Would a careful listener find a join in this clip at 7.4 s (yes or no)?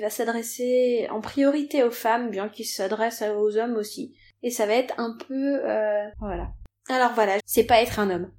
yes